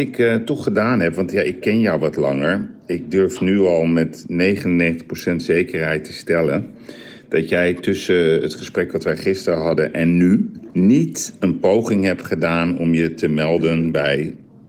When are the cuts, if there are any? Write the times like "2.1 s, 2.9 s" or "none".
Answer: 10.7 s

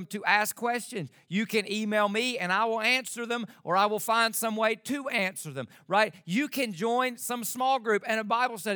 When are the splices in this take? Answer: none

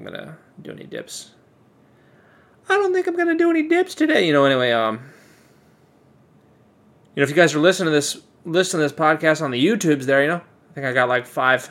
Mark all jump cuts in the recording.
none

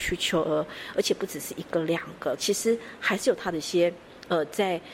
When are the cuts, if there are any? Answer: 2.4 s

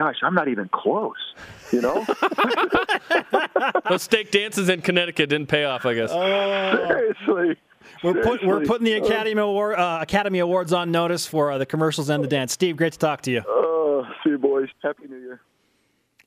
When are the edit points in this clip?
14.7 s

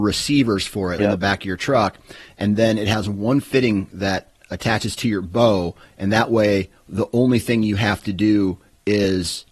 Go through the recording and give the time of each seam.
1.0 s

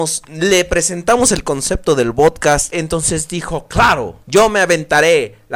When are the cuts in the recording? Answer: 2.7 s, 4.2 s

